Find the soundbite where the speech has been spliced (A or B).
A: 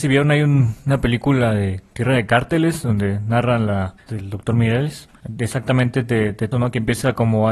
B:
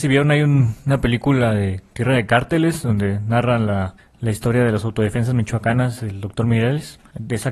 A